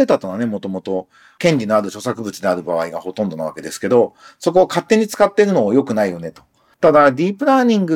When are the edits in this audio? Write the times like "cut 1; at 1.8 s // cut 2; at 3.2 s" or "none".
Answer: cut 1; at 6.7 s